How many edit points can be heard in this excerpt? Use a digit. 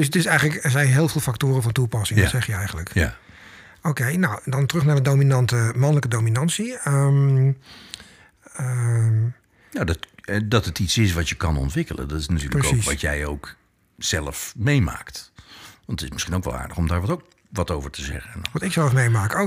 0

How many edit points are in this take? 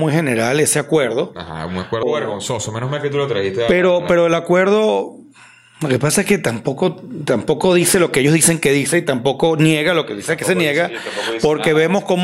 1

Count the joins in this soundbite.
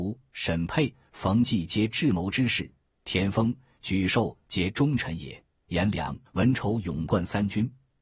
1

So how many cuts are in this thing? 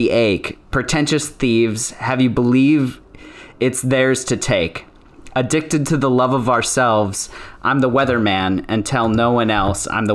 0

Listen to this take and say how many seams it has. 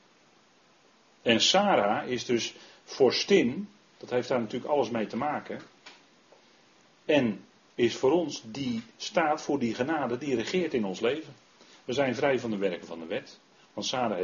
0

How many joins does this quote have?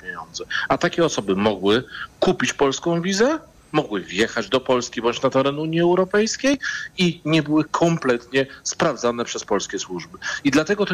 1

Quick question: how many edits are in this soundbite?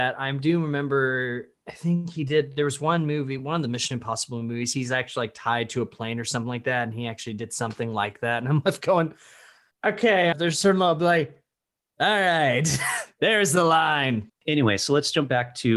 2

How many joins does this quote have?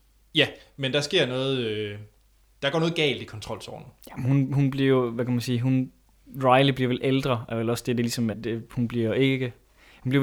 1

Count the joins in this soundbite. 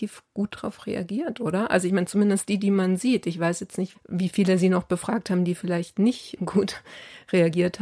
2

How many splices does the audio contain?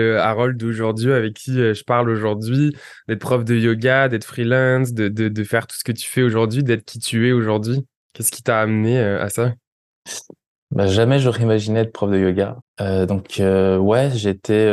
1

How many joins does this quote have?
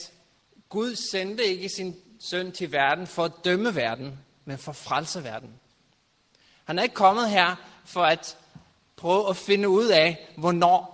0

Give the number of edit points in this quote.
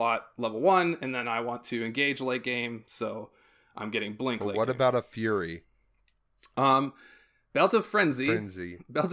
0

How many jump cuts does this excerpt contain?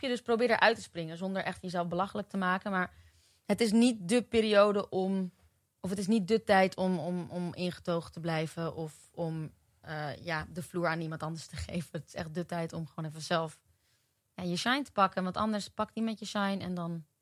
0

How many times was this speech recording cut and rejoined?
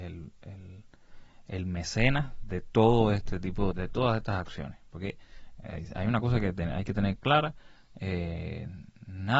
1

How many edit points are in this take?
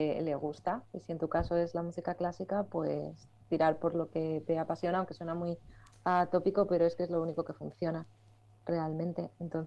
0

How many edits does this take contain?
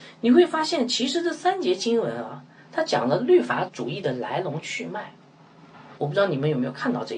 2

